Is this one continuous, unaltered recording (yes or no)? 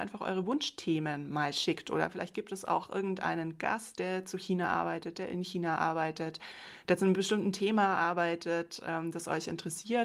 yes